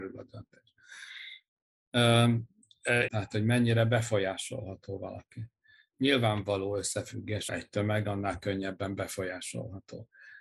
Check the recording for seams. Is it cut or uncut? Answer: cut